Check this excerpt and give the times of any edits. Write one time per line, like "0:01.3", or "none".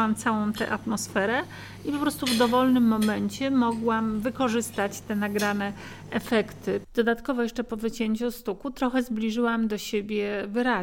0:06.8